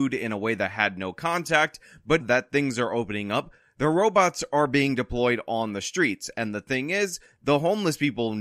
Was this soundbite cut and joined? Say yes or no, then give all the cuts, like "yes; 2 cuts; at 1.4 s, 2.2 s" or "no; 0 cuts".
yes; 1 cut; at 2.2 s